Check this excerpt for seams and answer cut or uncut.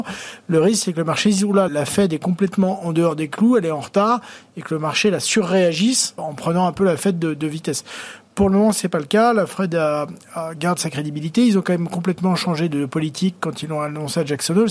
cut